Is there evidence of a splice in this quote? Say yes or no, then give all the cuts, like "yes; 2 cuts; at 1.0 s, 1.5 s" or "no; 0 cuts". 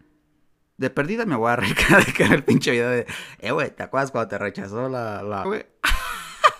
yes; 1 cut; at 5.4 s